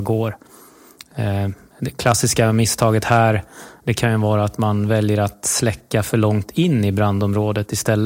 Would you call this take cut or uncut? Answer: uncut